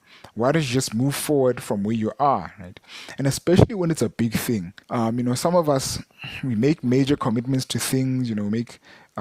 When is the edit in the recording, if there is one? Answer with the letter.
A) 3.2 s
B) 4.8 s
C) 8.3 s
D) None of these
B